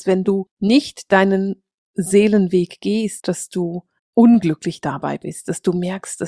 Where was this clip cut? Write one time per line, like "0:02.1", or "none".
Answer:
0:03.2